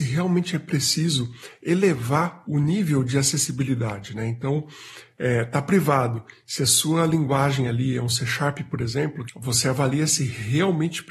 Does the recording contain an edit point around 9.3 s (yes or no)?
yes